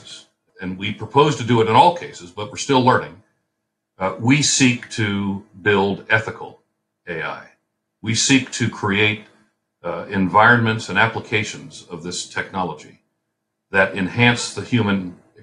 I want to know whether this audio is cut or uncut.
uncut